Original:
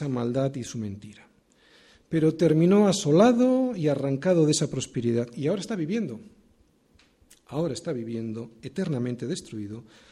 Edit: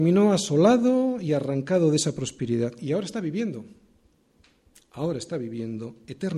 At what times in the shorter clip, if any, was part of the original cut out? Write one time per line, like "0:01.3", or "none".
none